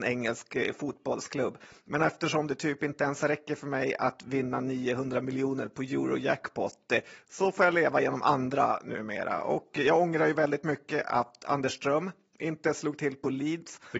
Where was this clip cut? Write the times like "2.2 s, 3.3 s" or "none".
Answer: none